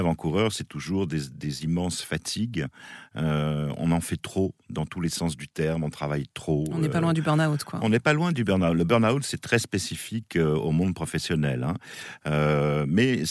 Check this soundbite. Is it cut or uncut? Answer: uncut